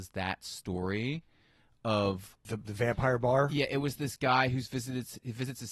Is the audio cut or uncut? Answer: uncut